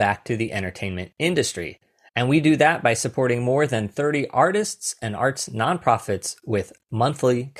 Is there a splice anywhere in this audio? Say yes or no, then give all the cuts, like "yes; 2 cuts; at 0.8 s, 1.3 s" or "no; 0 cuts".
no; 0 cuts